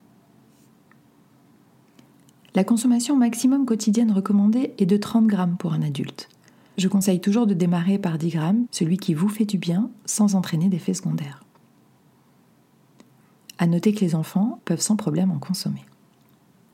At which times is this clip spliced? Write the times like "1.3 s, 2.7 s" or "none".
6.7 s, 8.7 s, 14.6 s